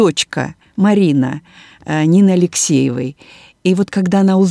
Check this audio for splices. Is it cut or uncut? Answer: uncut